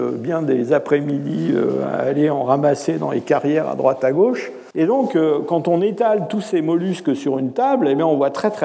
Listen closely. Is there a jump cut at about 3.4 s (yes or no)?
no